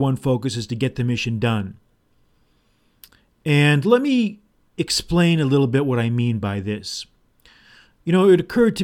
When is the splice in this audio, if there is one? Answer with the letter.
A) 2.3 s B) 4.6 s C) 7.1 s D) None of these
D